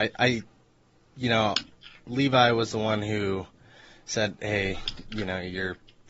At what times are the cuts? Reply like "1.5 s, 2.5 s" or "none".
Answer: none